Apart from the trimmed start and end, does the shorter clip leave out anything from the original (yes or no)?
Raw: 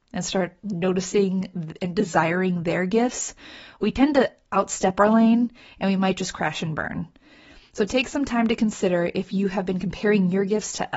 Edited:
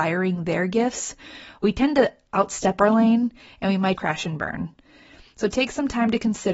yes